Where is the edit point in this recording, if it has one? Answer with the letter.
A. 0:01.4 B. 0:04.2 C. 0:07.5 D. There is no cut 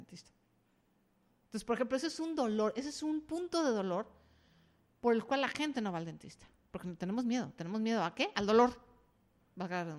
D